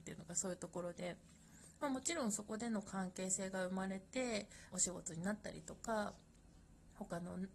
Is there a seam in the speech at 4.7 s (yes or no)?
yes